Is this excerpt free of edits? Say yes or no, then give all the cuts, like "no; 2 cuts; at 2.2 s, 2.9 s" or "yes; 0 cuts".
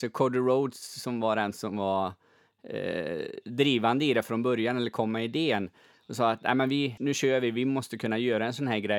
no; 1 cut; at 7.0 s